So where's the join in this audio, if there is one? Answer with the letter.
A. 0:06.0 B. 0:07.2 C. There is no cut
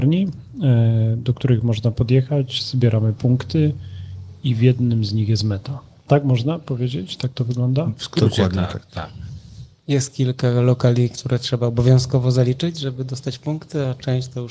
C